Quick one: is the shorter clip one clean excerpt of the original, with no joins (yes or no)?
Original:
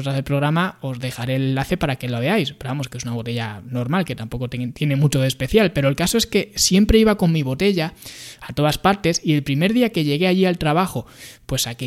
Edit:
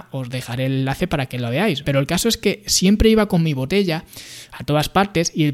no